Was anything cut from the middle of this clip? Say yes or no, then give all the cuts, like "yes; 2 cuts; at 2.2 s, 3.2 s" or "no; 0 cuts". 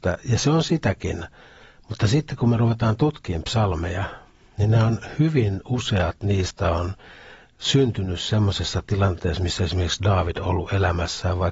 no; 0 cuts